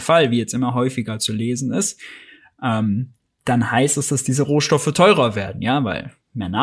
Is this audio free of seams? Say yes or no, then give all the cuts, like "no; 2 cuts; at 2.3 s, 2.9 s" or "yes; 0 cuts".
yes; 0 cuts